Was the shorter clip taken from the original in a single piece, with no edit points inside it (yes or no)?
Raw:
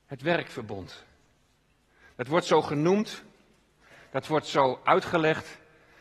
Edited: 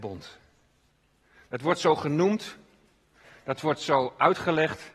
yes